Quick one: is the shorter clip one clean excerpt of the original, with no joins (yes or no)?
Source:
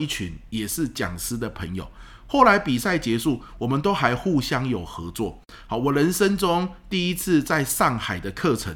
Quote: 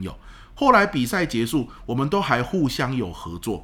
yes